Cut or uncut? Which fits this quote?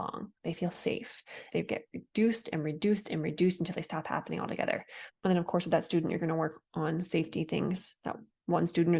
cut